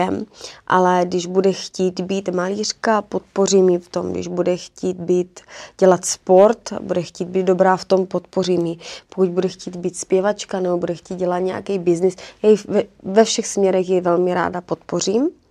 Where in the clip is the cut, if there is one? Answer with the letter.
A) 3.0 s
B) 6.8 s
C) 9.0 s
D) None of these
D